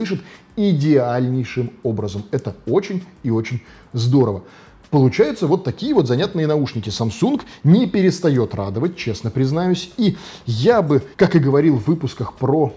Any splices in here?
yes; 1 cut; at 11.1 s

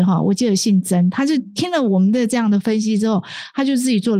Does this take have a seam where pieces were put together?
no; 0 cuts

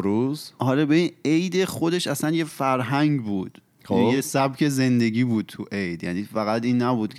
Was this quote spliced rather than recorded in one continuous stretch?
no; 0 cuts

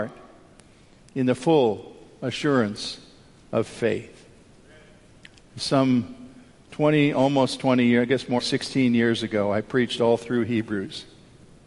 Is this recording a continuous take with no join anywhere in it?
no; 1 cut; at 8.4 s

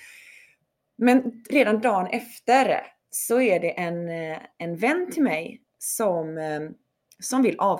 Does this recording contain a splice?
no; 0 cuts

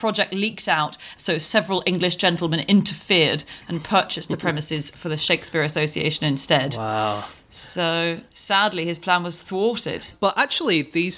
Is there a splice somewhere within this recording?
yes; 1 cut; at 1.1 s

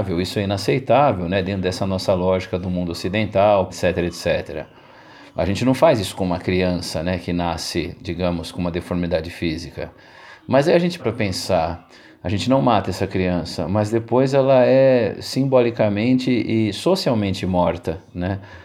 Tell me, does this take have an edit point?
yes; 2 cuts; at 3.7 s, 11.0 s

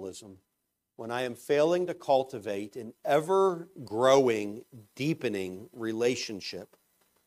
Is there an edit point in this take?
no; 0 cuts

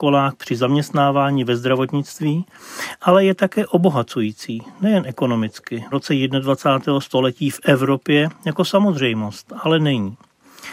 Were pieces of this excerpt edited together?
yes; 1 cut; at 5.9 s

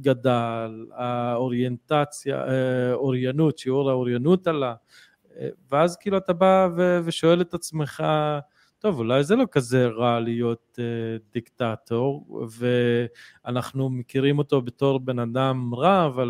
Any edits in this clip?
no; 0 cuts

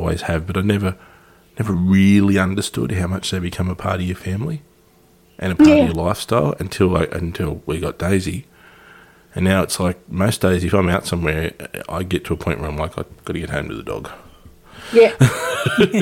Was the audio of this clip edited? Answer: no; 0 cuts

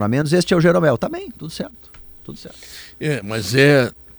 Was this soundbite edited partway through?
no; 0 cuts

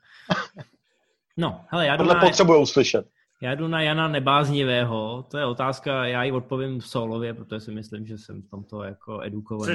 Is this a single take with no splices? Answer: yes; 0 cuts

